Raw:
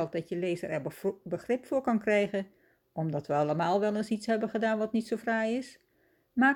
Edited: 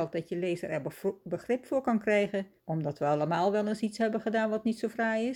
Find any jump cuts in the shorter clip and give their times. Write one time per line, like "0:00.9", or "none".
0:02.6